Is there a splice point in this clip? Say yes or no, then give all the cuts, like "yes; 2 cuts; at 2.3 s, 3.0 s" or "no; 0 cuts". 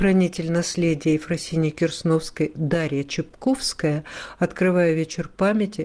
no; 0 cuts